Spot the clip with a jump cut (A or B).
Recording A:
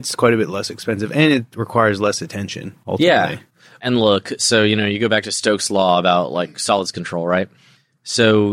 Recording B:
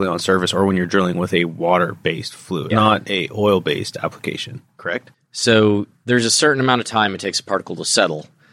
B